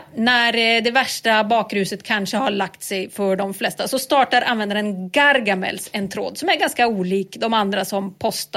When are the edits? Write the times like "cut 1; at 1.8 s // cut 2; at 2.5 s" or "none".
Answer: none